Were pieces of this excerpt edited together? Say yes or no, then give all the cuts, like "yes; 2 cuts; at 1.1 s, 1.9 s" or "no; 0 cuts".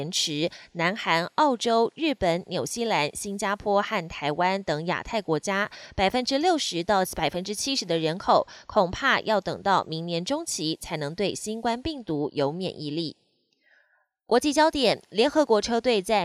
no; 0 cuts